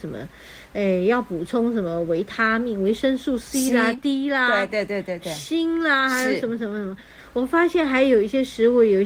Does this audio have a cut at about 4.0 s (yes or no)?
no